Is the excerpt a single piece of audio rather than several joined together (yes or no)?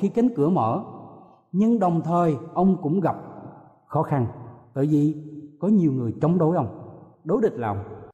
yes